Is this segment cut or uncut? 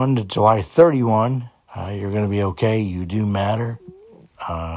cut